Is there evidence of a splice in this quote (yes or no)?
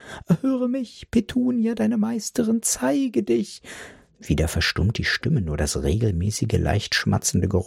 no